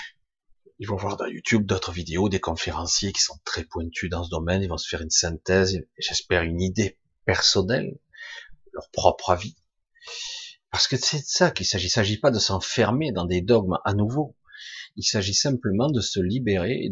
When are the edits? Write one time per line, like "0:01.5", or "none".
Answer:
none